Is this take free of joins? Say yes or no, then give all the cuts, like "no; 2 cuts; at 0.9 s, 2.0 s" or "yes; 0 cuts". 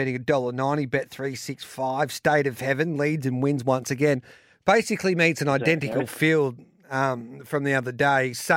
yes; 0 cuts